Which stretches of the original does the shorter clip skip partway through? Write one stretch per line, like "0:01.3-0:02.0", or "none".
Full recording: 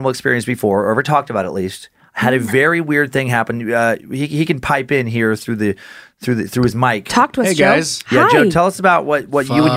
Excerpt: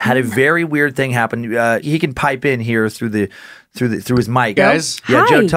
0:04.0-0:04.3
0:07.0-0:07.6